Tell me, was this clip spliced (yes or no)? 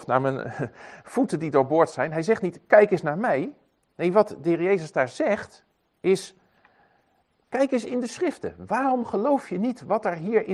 no